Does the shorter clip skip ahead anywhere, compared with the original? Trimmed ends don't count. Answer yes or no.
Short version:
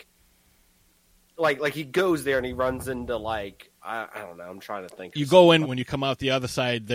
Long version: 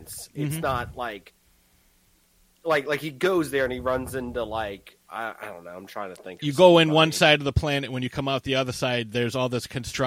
yes